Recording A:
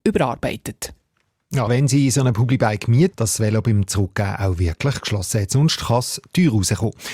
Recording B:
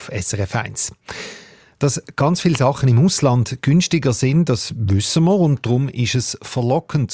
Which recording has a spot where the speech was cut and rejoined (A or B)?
A